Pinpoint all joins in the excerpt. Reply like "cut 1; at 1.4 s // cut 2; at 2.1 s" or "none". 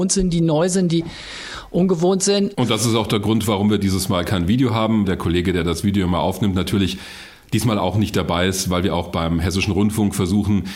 cut 1; at 2.5 s // cut 2; at 5.0 s